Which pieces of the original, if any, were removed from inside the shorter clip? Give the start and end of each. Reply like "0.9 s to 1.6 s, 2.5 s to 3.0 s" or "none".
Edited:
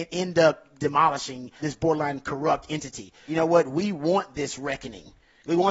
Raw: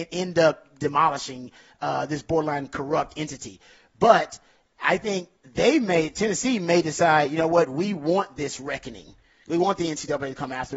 1.6 s to 2.1 s, 3.7 s to 7.3 s